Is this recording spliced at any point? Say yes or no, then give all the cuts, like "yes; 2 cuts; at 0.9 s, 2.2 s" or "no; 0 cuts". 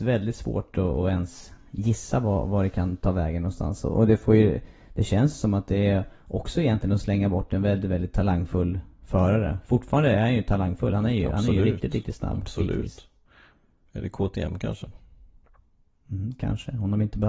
no; 0 cuts